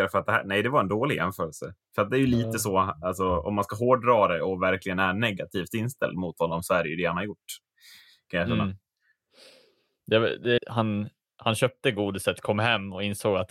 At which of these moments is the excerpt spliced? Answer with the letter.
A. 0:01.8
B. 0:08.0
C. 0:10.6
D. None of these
C